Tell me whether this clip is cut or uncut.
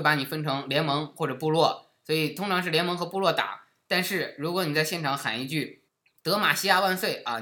cut